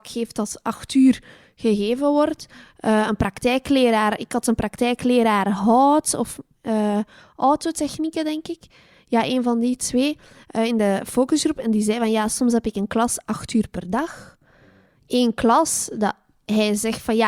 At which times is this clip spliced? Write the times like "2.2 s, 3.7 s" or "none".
none